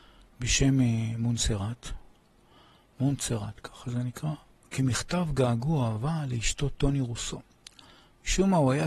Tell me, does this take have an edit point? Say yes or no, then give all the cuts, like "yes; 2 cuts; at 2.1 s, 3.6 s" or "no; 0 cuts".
no; 0 cuts